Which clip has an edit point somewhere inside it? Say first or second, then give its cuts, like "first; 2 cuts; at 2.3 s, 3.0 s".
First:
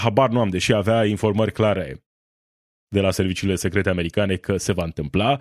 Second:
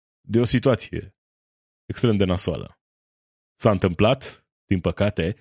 second; 1 cut; at 3.5 s